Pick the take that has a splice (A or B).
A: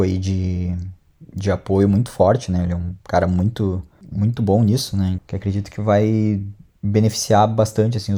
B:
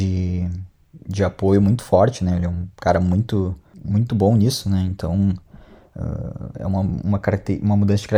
A